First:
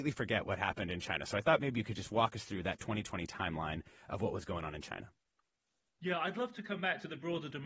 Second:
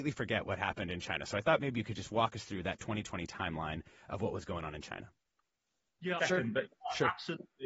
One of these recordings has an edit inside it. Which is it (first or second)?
second